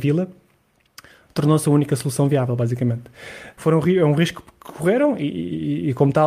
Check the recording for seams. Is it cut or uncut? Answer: cut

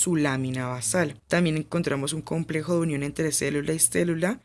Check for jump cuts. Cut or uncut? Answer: cut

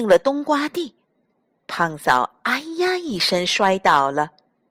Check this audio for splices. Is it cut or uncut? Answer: cut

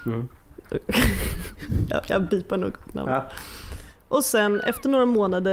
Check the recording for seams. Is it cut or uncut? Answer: uncut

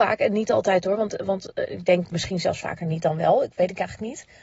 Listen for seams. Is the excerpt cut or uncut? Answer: uncut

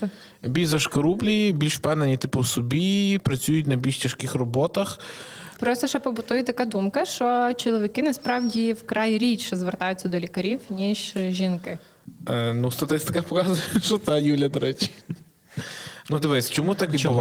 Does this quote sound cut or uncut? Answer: cut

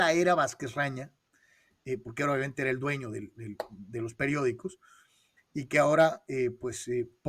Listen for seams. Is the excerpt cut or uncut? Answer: uncut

